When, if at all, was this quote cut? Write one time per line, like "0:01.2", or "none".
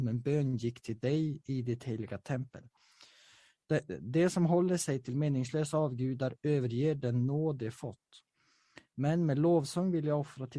none